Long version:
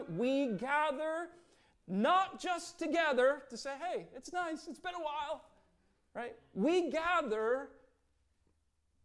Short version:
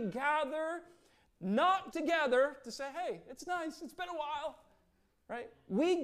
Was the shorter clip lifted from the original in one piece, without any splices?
no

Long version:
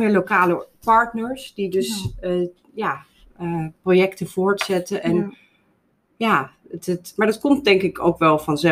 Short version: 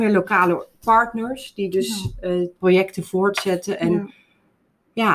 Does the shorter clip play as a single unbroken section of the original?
no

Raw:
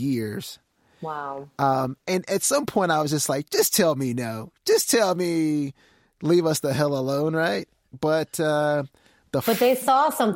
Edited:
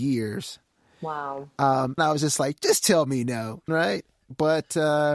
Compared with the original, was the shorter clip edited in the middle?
yes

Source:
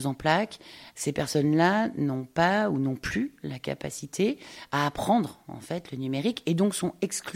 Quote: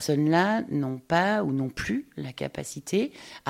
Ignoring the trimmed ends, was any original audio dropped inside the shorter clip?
no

